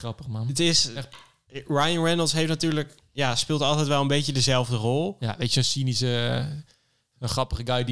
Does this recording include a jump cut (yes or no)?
no